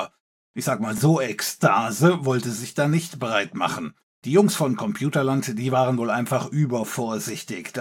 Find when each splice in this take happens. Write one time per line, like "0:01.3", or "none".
none